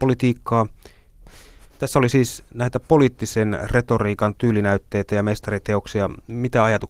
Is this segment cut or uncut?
cut